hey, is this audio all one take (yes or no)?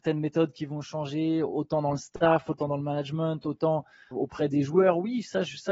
no